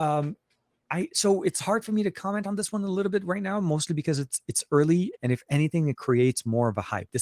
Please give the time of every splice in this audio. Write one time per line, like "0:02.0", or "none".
0:05.1